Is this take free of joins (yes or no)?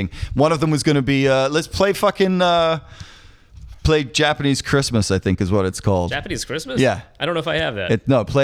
yes